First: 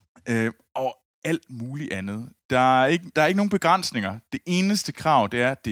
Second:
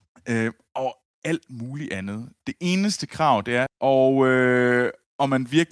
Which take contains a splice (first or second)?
second